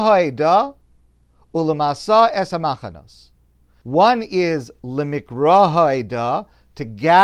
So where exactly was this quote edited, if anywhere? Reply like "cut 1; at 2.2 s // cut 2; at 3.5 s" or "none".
cut 1; at 3.8 s